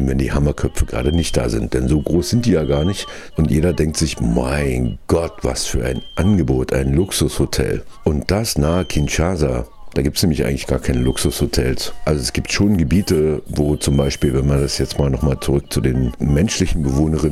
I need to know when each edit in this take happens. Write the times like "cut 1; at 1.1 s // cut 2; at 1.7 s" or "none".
none